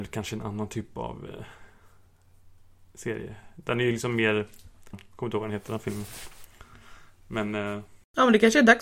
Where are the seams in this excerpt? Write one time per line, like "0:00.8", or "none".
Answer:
0:04.9